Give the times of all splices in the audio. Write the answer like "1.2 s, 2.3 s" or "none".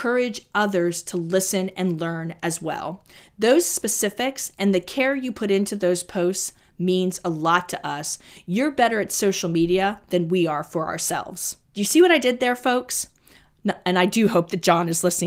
11.6 s

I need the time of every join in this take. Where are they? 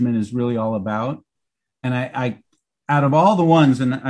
none

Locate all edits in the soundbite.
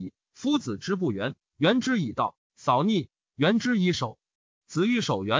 1.4 s

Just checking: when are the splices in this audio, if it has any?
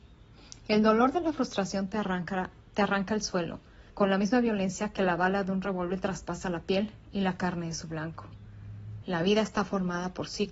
3.9 s, 9.0 s

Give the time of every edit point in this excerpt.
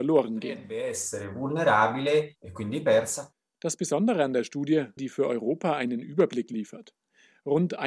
5.0 s

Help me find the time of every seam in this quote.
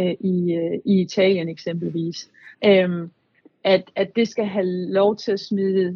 2.5 s

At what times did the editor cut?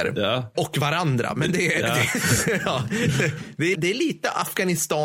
3.7 s

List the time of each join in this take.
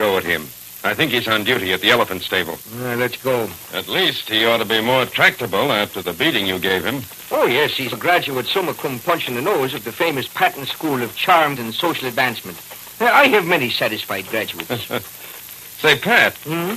3.7 s, 7.9 s, 11.6 s

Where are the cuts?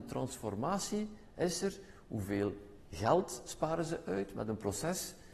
none

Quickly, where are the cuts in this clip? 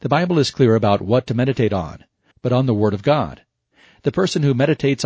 2.3 s

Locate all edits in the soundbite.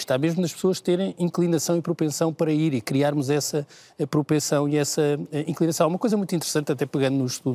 none

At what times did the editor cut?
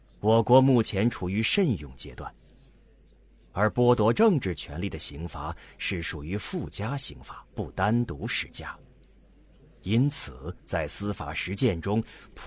7.5 s, 10.6 s

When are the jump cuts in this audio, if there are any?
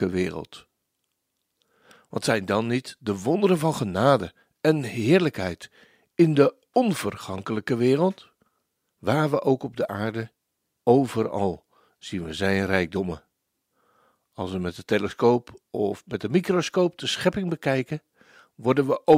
8.9 s, 10.8 s

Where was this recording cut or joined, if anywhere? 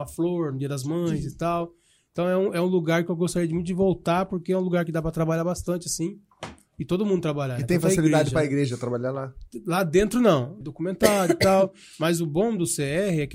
10.6 s

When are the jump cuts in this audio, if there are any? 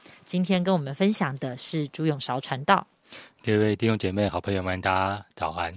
none

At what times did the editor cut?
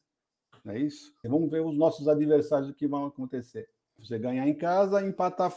1.2 s, 4.0 s

